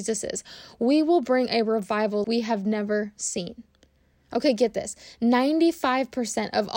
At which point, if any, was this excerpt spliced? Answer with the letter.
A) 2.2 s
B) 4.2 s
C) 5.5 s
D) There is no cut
A